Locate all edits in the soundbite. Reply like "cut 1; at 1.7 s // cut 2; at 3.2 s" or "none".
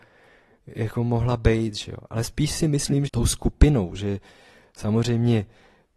cut 1; at 3.1 s